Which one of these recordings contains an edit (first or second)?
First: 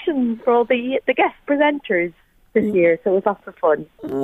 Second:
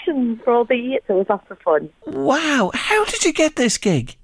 second